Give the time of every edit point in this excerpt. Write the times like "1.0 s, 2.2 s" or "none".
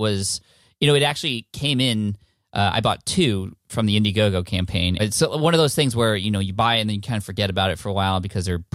5.0 s